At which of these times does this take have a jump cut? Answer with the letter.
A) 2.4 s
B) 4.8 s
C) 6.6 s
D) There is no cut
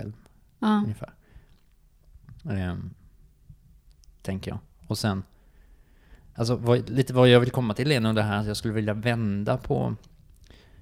D